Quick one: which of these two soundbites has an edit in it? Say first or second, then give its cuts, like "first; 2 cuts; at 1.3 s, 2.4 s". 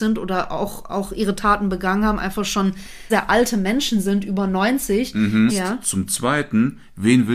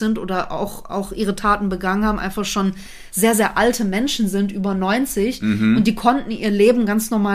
first; 2 cuts; at 3.1 s, 5.5 s